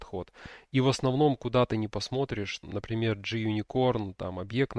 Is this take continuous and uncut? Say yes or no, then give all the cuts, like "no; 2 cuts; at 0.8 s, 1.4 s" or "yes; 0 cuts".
no; 1 cut; at 2.6 s